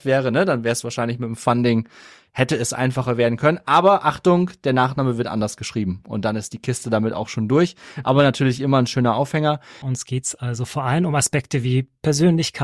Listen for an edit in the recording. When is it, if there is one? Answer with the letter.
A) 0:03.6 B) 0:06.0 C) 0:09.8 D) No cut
C